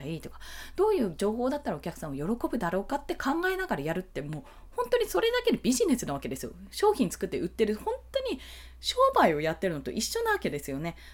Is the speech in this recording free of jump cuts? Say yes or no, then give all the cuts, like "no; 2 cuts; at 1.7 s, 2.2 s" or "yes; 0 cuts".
yes; 0 cuts